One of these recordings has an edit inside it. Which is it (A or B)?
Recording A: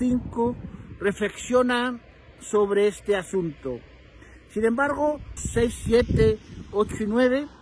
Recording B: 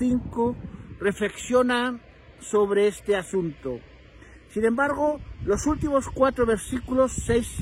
A